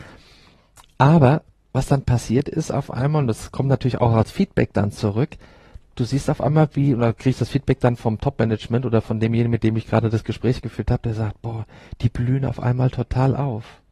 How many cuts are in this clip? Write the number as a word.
zero